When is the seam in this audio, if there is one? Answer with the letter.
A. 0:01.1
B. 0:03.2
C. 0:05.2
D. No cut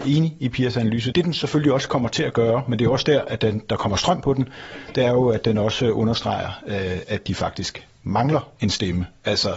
A